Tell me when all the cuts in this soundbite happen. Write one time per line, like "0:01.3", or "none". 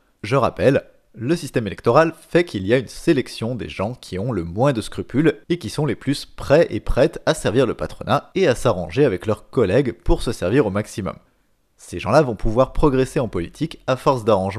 none

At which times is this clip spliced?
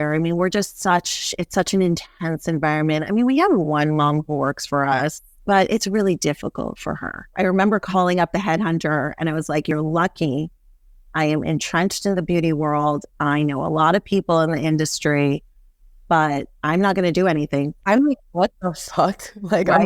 0:07.3
0:17.8

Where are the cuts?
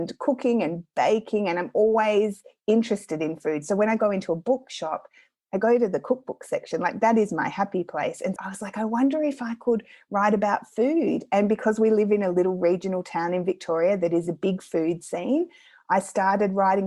0:08.4

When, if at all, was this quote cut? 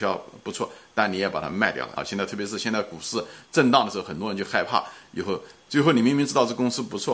0:02.0

